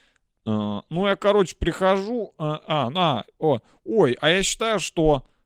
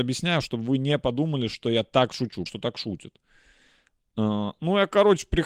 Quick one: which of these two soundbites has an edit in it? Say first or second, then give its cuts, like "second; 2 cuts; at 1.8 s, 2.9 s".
second; 1 cut; at 2.5 s